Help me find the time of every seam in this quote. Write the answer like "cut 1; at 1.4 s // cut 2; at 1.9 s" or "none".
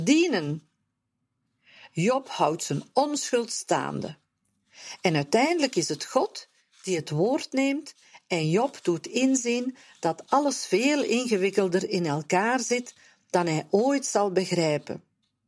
none